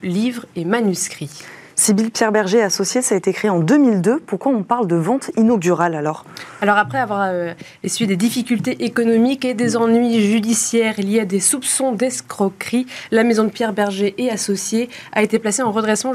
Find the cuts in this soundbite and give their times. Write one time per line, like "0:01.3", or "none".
none